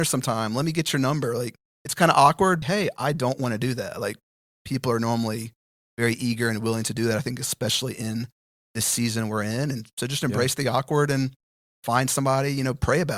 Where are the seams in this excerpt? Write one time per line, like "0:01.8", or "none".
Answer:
0:02.6